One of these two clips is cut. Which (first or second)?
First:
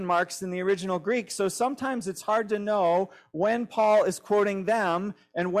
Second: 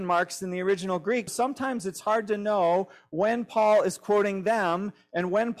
second